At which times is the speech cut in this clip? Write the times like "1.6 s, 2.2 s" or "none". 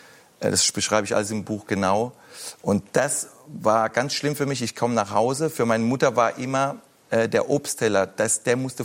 2.6 s